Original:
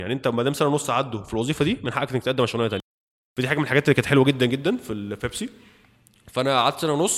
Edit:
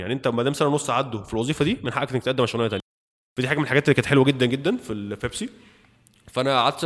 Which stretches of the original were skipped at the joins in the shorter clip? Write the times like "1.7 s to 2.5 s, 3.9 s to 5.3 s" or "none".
none